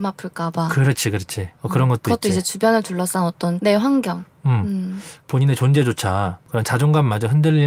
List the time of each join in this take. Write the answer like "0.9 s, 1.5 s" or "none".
5.2 s